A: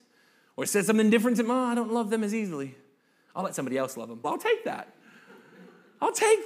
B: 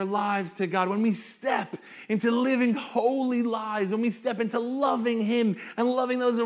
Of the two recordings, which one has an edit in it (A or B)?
A